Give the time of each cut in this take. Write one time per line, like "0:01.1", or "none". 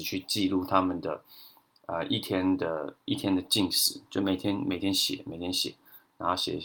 none